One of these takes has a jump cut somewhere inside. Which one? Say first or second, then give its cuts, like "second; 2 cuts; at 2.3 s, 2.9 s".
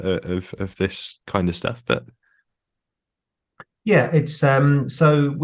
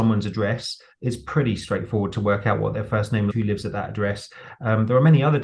second; 1 cut; at 3.3 s